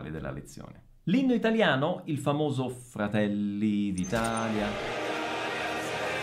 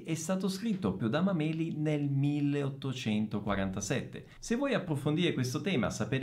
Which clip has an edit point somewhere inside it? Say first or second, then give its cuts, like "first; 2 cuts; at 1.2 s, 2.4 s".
second; 2 cuts; at 1.0 s, 4.4 s